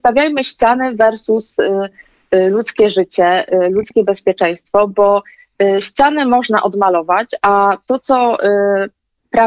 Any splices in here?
no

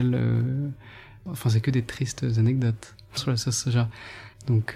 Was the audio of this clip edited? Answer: yes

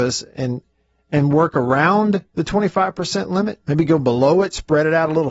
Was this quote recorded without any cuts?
yes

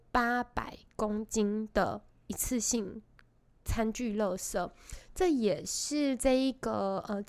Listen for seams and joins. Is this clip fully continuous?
yes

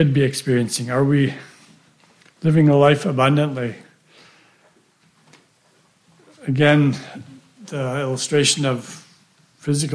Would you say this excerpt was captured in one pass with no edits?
yes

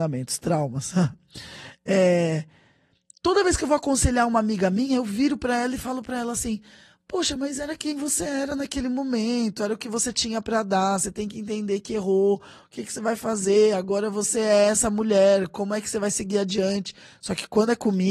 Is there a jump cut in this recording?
no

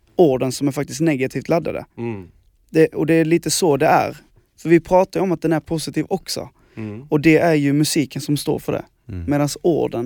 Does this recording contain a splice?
no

